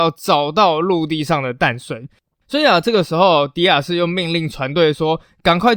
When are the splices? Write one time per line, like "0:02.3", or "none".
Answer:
none